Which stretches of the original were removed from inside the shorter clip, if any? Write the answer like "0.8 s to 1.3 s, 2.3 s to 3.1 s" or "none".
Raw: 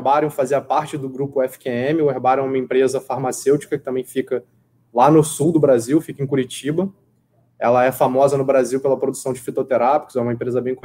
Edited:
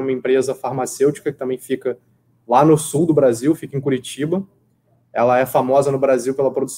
none